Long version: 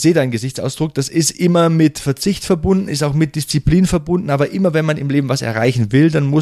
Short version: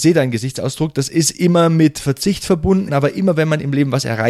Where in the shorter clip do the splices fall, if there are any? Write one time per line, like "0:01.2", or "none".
0:02.9